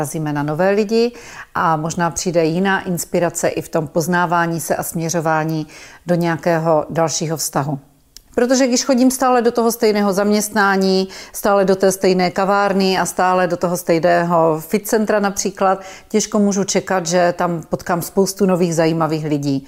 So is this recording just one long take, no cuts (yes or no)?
no